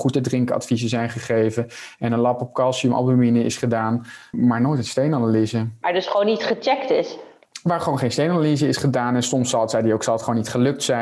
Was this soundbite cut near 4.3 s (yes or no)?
yes